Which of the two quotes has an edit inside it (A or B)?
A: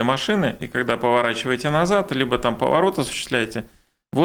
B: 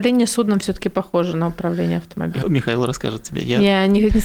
B